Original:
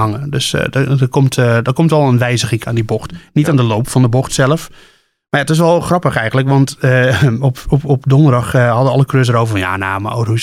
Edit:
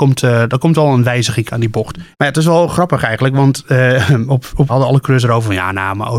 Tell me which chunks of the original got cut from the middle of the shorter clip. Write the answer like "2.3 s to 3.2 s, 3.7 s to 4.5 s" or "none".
3.3 s to 5.2 s, 7.8 s to 8.7 s